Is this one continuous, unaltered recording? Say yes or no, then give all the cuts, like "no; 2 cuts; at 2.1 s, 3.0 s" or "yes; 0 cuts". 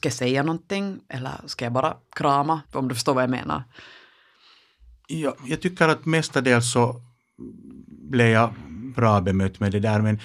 no; 2 cuts; at 2.6 s, 5.4 s